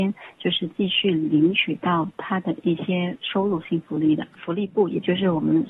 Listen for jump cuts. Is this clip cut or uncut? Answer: cut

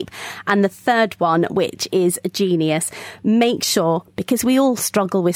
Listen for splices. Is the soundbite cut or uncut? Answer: uncut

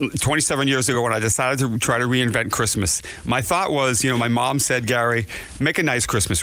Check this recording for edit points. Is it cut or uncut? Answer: uncut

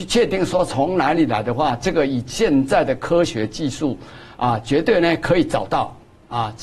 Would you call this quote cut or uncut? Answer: uncut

